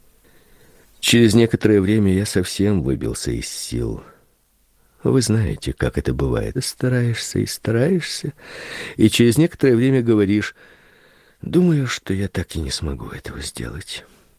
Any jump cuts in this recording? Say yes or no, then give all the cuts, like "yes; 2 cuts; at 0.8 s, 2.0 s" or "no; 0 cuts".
yes; 1 cut; at 6.5 s